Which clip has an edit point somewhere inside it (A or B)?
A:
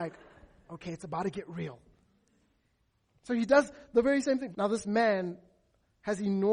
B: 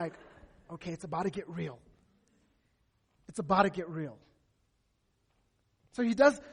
A